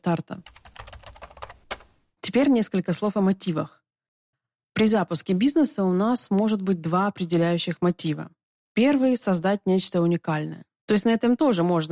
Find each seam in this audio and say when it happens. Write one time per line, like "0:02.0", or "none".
0:10.8